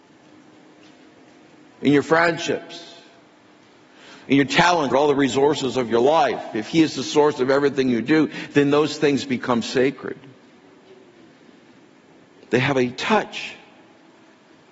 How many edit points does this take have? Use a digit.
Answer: 1